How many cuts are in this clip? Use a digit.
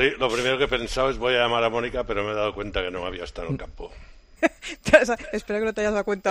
1